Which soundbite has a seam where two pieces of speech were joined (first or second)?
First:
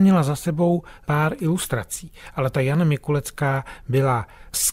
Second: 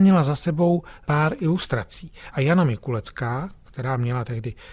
second